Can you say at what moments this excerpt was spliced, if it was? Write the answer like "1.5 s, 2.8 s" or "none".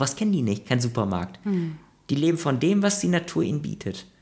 none